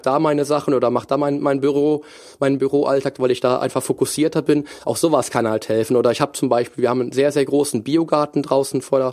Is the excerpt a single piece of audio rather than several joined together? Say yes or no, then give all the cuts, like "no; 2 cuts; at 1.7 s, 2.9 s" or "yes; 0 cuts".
yes; 0 cuts